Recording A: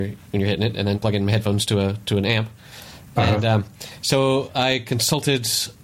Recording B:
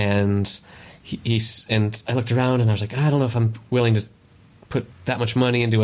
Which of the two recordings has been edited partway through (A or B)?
A